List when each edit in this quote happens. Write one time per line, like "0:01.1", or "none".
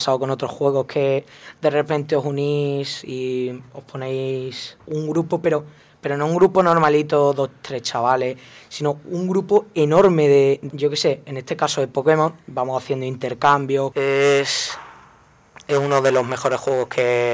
0:10.7
0:13.9